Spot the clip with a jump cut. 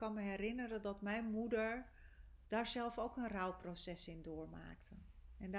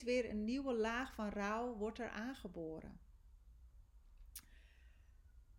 first; 1 cut; at 2.4 s

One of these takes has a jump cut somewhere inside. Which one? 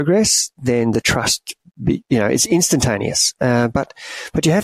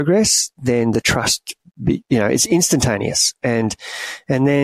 first; 1 cut; at 3.4 s

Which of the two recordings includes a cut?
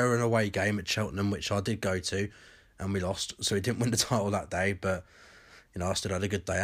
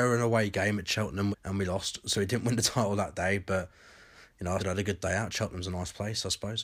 second; 2 cuts; at 1.3 s, 4.6 s

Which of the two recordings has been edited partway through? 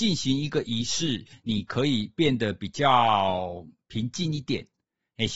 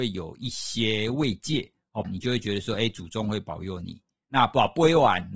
second; 1 cut; at 2.0 s

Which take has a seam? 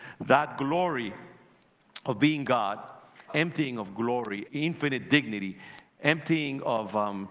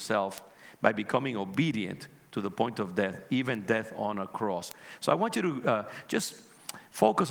first; 2 cuts; at 3.3 s, 4.4 s

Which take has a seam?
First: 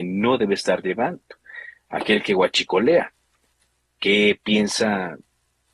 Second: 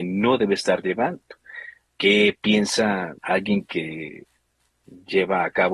second; 2 cuts; at 1.8 s, 3.2 s

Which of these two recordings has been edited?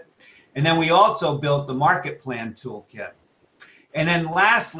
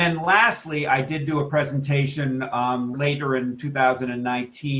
second; 1 cut; at 2.9 s

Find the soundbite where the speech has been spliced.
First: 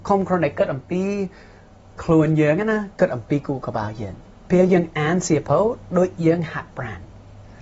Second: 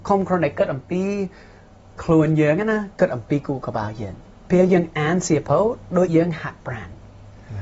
second; 1 cut; at 6.1 s

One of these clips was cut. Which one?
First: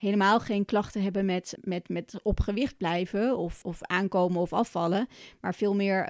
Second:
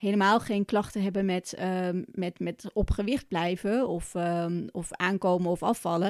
first; 2 cuts; at 1.6 s, 3.6 s

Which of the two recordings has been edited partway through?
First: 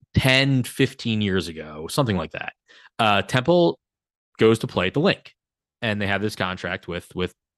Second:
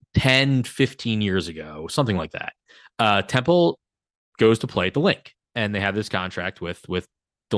second; 1 cut; at 5.5 s

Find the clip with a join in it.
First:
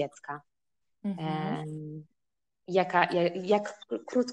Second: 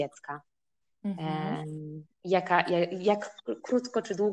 second; 1 cut; at 2.1 s

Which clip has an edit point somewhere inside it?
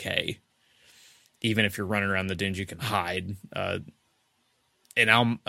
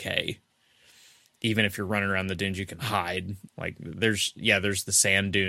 second; 1 cut; at 3.5 s

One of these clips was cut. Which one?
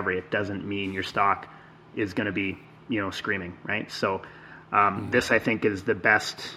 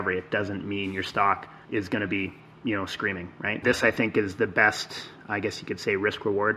second; 2 cuts; at 1.6 s, 3.6 s

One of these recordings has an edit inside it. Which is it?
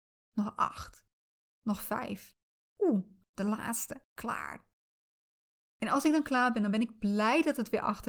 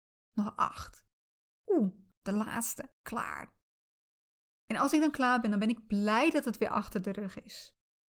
second; 1 cut; at 1.5 s

